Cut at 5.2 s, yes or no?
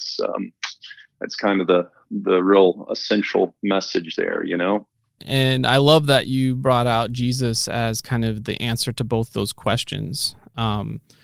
yes